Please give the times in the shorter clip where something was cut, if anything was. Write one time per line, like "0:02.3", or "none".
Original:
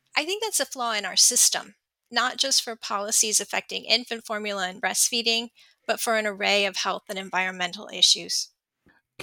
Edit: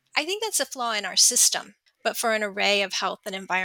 0:01.9